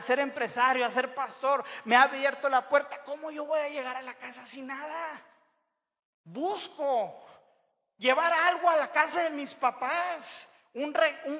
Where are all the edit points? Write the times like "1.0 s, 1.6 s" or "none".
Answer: none